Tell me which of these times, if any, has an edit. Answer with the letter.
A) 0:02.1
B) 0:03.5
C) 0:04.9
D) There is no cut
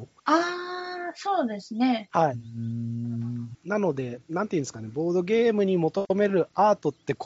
B